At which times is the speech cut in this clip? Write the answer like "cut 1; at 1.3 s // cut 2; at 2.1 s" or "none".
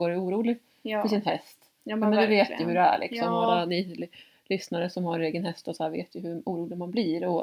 none